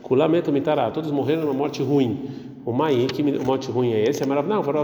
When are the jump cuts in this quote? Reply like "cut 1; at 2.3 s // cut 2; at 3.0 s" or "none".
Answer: none

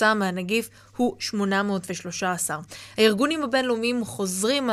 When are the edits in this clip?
none

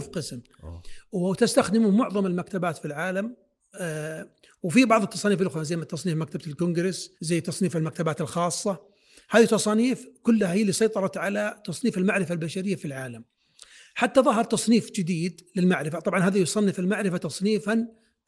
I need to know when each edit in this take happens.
cut 1; at 7.2 s

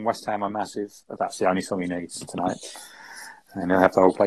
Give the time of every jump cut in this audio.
cut 1; at 1.2 s

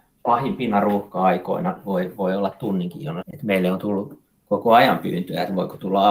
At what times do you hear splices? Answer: cut 1; at 3.2 s

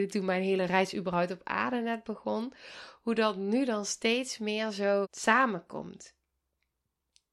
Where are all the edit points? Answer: cut 1; at 5.0 s

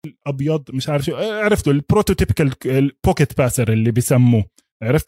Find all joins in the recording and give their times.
none

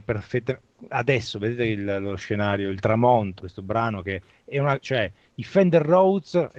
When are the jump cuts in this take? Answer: cut 1; at 3.4 s // cut 2; at 4.8 s

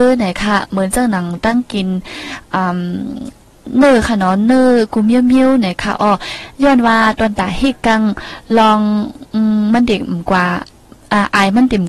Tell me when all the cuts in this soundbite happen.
none

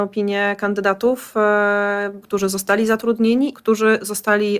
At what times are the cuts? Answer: cut 1; at 2.2 s // cut 2; at 3.5 s

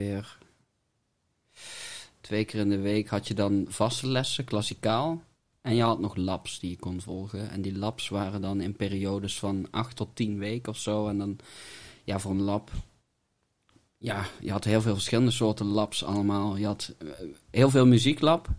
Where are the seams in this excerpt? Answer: none

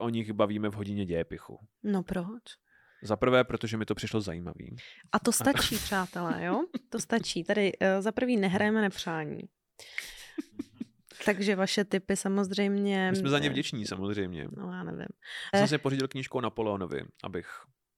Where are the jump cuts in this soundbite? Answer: cut 1; at 15.5 s

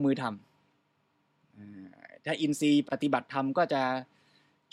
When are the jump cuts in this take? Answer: cut 1; at 2.9 s

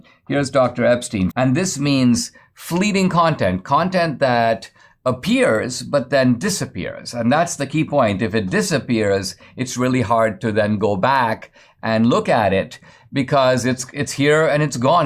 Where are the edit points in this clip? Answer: cut 1; at 1.3 s

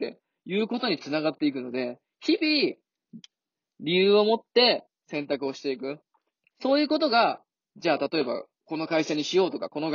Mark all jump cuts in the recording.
cut 1; at 6.5 s

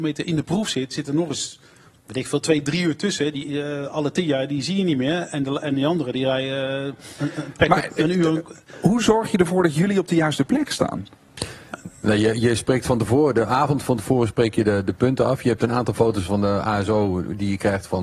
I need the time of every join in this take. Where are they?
cut 1; at 7.2 s

